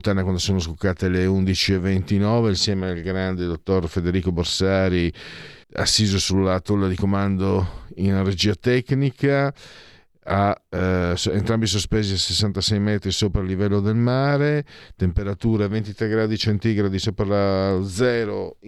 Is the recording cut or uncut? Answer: cut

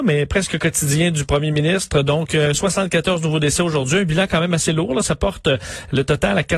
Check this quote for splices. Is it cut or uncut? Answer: uncut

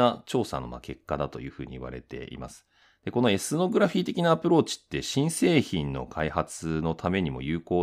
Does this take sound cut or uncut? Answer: uncut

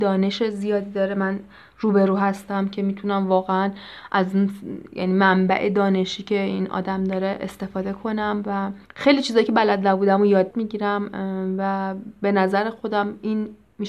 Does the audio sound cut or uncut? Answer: cut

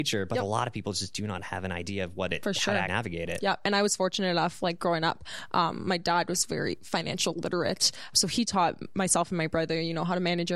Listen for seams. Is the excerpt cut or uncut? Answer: cut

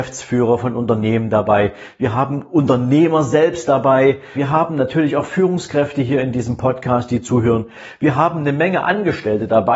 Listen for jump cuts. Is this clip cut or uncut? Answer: cut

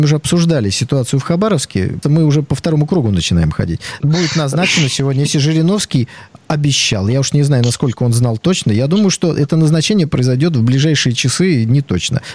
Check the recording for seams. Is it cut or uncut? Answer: cut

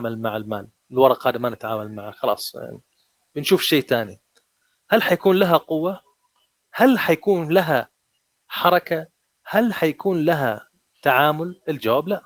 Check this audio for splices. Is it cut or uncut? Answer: uncut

